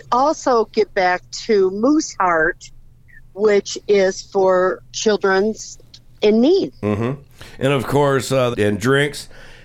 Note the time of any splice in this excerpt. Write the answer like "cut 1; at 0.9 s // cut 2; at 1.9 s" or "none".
cut 1; at 4.8 s // cut 2; at 8.5 s